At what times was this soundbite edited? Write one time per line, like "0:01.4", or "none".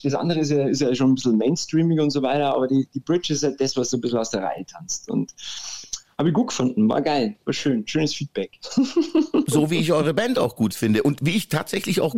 none